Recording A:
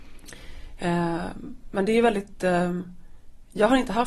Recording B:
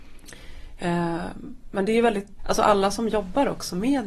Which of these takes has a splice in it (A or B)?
B